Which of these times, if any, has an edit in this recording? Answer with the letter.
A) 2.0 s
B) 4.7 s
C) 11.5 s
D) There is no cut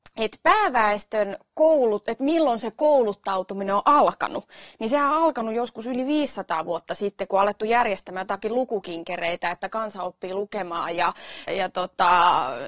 C